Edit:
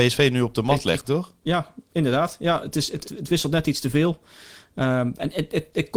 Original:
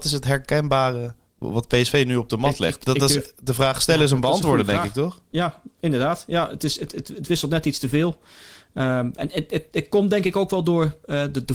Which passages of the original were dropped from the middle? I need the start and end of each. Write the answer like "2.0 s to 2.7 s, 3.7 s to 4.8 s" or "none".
2.8 s to 4.9 s, 6.9 s to 7.0 s